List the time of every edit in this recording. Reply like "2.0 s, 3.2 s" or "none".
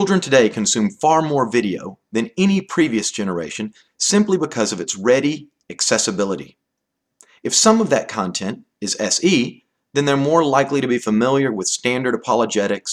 none